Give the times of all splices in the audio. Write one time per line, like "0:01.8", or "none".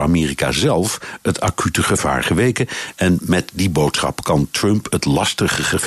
none